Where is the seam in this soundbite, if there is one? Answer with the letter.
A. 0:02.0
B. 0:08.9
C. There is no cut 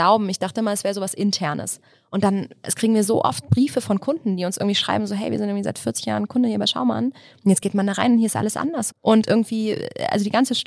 B